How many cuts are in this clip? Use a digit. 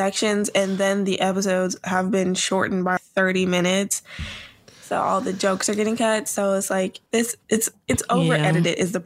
1